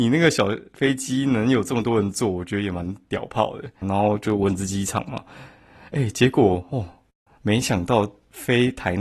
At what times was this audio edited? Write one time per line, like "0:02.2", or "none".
0:03.8